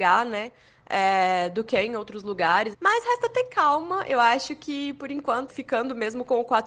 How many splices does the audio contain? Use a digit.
2